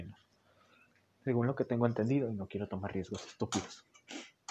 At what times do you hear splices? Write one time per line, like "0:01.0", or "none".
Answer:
none